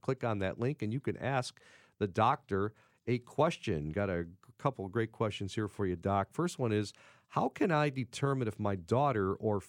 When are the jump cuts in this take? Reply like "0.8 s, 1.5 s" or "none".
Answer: none